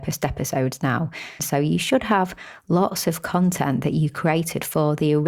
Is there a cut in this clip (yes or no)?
yes